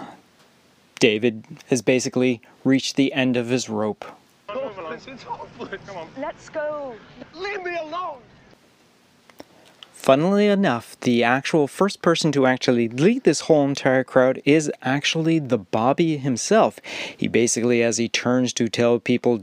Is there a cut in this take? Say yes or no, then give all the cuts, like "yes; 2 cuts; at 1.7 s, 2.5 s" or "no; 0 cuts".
no; 0 cuts